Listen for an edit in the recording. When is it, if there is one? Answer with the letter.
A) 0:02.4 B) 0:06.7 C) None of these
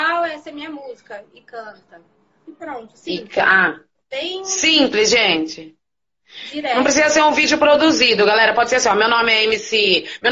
C